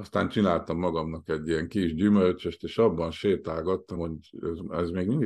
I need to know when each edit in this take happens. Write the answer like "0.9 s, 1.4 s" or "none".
4.0 s